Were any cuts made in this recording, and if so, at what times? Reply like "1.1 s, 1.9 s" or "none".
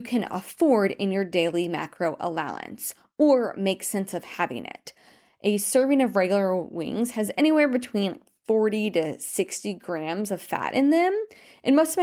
none

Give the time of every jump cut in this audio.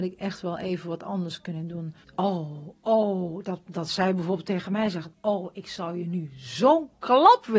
2.0 s

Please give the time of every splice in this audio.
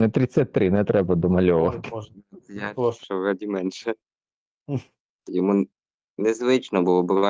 3.0 s, 5.2 s

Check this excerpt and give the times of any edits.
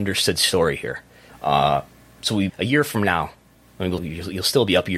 1.3 s, 2.5 s, 4.0 s

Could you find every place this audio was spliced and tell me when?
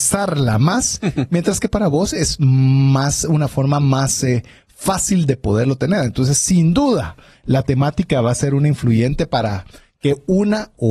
none

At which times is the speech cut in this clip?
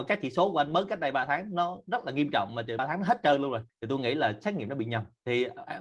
2.8 s

